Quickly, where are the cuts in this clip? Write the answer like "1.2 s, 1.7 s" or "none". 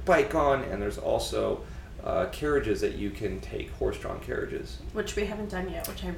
none